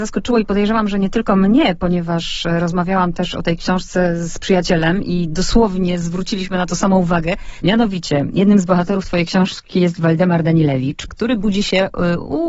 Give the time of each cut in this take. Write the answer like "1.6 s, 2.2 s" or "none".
7.6 s, 11.1 s